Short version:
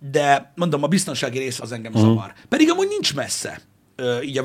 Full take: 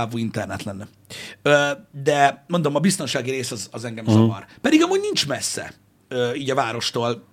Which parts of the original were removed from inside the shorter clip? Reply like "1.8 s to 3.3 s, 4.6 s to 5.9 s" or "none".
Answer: 3.5 s to 3.7 s